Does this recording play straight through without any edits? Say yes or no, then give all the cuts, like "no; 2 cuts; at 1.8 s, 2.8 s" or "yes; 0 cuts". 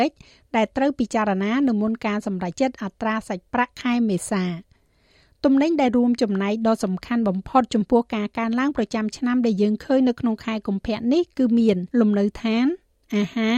no; 2 cuts; at 2.5 s, 11.9 s